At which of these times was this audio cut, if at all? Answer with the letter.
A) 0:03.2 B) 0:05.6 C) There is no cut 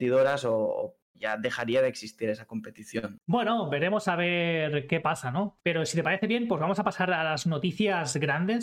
B